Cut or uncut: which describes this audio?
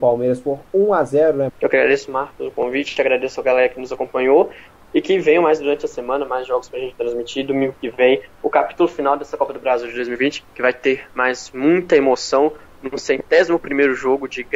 cut